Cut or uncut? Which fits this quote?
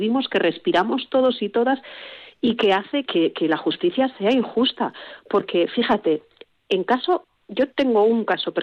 cut